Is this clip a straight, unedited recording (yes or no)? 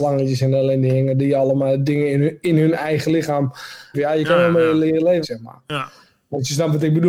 no